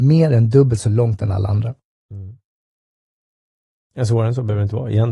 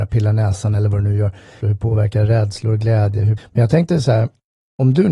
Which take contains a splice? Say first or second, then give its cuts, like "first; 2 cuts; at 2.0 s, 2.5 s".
second; 2 cuts; at 1.6 s, 3.4 s